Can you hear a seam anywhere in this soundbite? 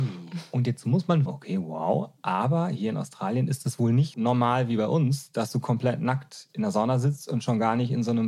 yes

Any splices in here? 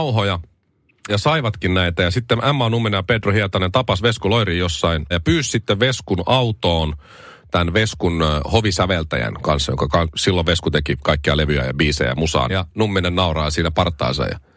yes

